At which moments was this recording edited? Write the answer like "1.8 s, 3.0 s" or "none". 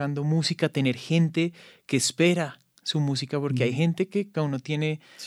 4.3 s